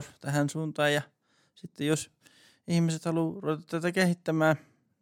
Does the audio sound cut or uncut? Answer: uncut